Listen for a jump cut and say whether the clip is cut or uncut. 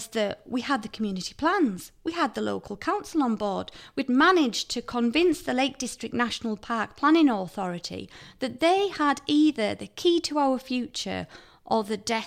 uncut